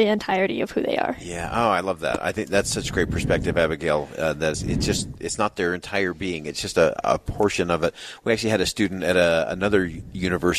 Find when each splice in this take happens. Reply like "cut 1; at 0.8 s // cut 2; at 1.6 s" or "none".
cut 1; at 4.5 s